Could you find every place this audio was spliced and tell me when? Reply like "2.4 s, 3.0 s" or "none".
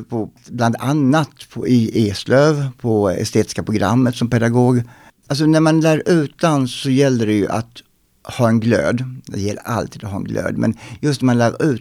5.1 s

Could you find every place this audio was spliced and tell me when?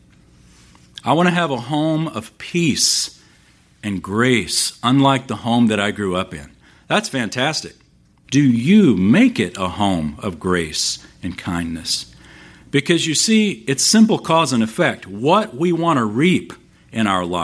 8.2 s

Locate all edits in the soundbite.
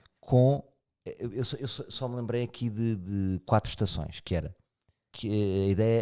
5.1 s

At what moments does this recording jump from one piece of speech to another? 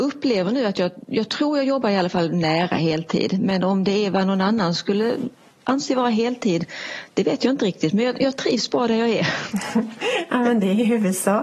none

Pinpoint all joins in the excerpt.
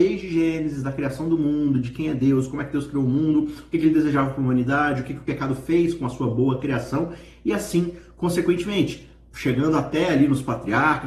none

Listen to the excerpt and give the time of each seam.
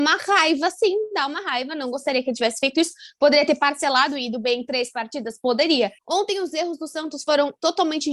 6.0 s

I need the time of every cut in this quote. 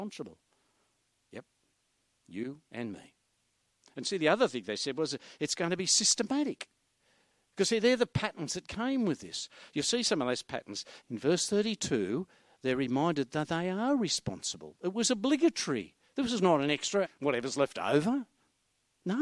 7.5 s, 11.0 s, 17.0 s

